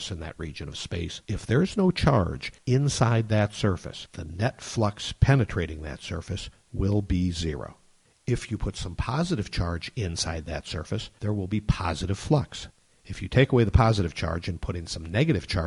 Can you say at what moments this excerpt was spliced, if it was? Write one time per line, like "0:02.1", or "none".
none